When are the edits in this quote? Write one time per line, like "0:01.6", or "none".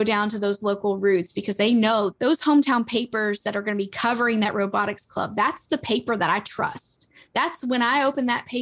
none